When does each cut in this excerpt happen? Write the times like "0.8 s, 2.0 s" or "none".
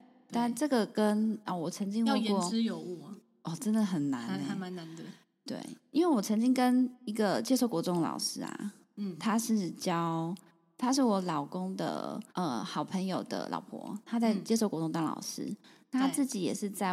12.3 s